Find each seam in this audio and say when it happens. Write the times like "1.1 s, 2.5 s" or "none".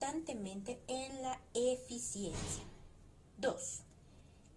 none